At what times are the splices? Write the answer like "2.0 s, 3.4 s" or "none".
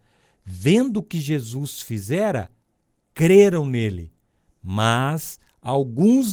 none

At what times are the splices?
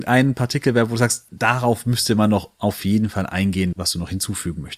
3.7 s

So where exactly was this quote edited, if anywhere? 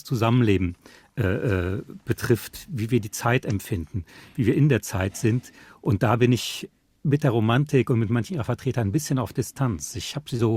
none

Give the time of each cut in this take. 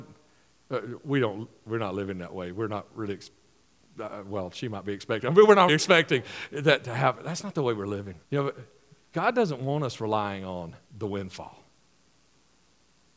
5.7 s, 8.2 s, 10.9 s

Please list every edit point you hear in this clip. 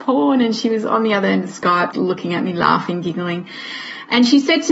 1.9 s

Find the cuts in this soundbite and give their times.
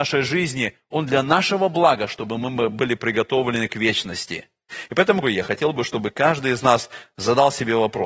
5.2 s

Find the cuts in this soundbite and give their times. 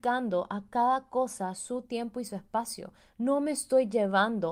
none

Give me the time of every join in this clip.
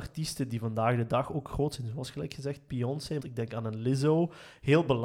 3.2 s

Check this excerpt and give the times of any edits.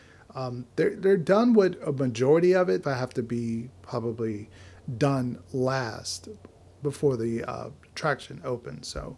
1.0 s, 2.8 s

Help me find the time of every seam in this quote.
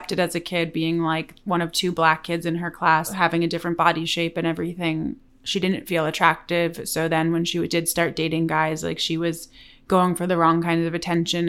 none

